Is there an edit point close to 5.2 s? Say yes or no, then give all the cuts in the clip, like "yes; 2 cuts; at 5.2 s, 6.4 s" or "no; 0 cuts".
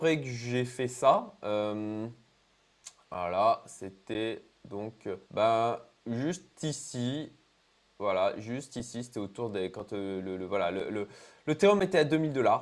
yes; 1 cut; at 5.2 s